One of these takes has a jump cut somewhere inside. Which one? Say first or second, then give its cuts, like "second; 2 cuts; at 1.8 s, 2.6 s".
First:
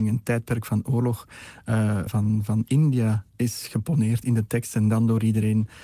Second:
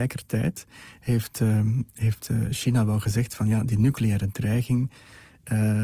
first; 1 cut; at 2.1 s